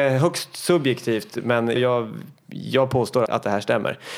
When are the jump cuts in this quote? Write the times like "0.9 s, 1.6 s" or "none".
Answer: 1.8 s, 3.3 s